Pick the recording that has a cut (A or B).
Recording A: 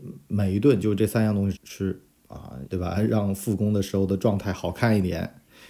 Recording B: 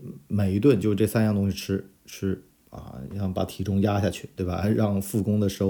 A